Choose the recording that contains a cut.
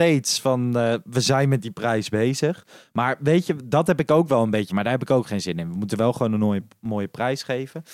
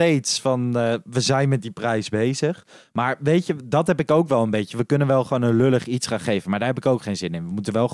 first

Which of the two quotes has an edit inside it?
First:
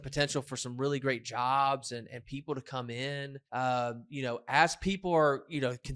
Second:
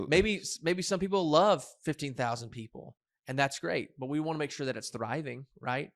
first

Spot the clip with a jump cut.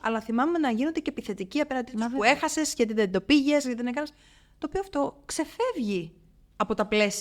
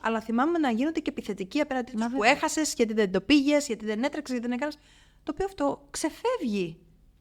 first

